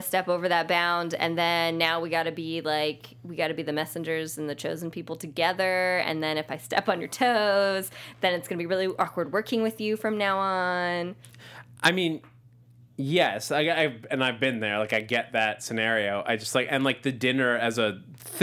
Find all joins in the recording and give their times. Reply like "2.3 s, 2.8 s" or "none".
none